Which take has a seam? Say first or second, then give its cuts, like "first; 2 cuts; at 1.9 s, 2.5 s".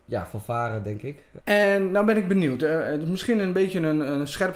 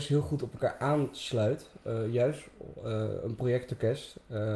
first; 1 cut; at 1.4 s